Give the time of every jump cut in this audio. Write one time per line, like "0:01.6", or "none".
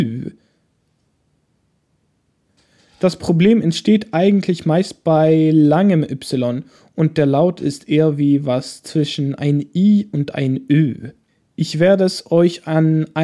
none